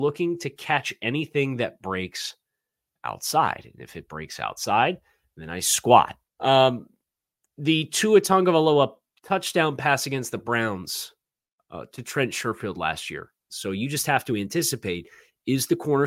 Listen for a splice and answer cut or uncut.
cut